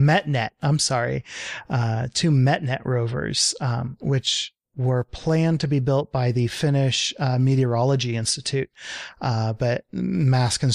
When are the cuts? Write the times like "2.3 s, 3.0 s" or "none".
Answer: none